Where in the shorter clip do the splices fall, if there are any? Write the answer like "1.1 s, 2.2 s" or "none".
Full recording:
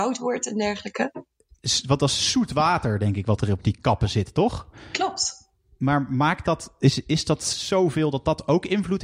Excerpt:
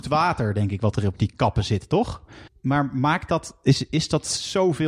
2.5 s